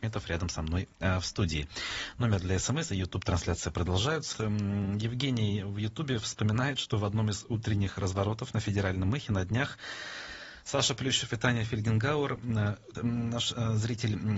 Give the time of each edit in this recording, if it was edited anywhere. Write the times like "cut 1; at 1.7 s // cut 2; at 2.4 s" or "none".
cut 1; at 4.3 s // cut 2; at 12.9 s